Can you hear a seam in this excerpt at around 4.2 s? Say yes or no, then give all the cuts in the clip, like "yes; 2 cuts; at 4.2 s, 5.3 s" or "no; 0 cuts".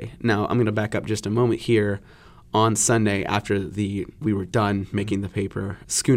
yes; 1 cut; at 4.2 s